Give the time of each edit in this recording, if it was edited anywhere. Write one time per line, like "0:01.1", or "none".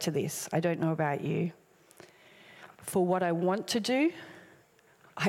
0:02.7